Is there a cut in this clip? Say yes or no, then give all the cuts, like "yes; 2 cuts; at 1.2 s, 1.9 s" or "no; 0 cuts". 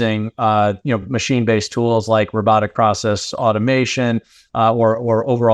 no; 0 cuts